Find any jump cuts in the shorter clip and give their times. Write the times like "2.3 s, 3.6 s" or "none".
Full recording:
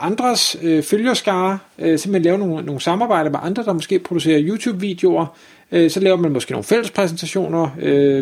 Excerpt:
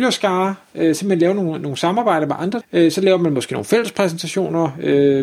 2.6 s